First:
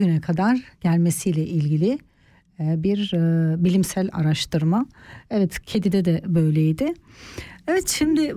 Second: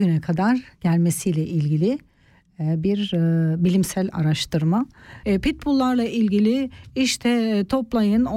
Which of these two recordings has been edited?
second; 1 cut; at 5.2 s

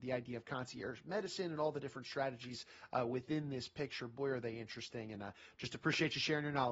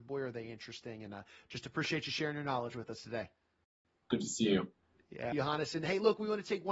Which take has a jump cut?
second; 2 cuts; at 4.0 s, 5.3 s

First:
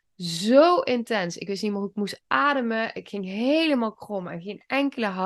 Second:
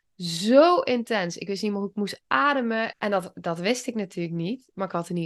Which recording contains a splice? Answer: second; 1 cut; at 2.9 s

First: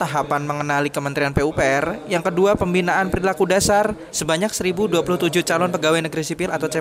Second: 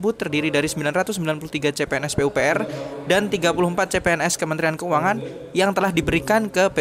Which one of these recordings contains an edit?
first; 1 cut; at 4.1 s

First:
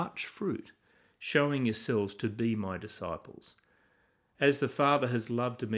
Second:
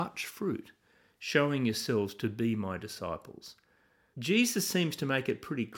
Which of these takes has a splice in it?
second; 1 cut; at 4.1 s

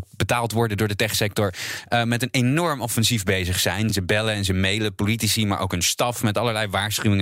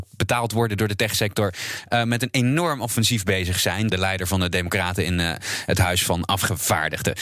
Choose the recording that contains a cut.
second; 1 cut; at 3.9 s

